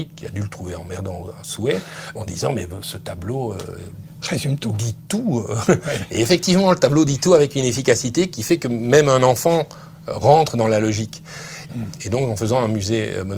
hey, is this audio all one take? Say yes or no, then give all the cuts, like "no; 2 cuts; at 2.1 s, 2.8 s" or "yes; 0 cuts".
no; 1 cut; at 11.7 s